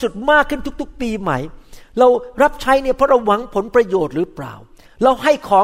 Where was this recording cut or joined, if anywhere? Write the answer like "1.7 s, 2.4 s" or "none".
none